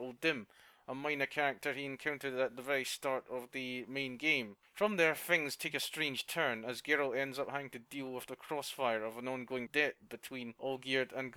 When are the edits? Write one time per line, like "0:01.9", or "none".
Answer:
none